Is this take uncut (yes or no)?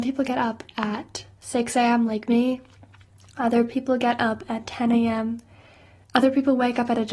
yes